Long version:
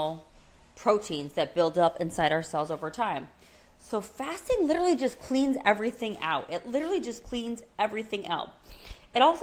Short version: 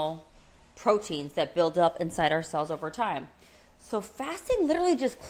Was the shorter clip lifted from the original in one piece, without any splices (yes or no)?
yes